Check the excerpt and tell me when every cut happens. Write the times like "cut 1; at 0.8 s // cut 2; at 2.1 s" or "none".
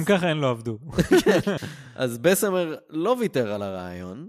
cut 1; at 1.6 s

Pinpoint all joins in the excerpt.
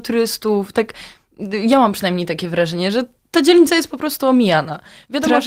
none

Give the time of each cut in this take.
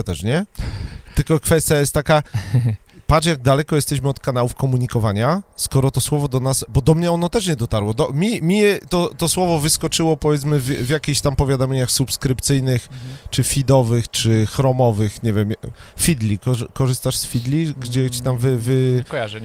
none

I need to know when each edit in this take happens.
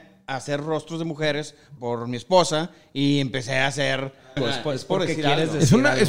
cut 1; at 1.8 s // cut 2; at 4.4 s

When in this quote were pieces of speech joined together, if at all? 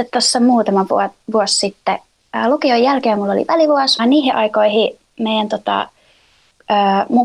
cut 1; at 4.0 s

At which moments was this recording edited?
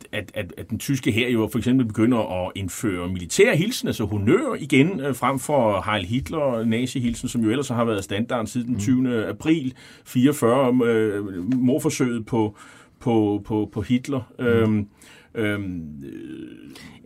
none

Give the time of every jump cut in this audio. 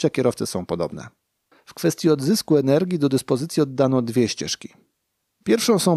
cut 1; at 1.5 s

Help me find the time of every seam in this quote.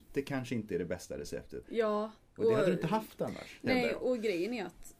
cut 1; at 1.6 s

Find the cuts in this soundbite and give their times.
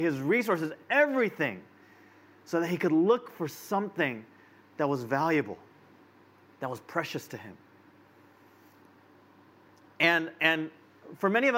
none

